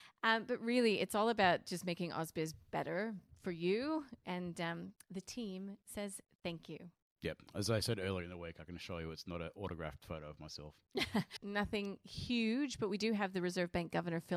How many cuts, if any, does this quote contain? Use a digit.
1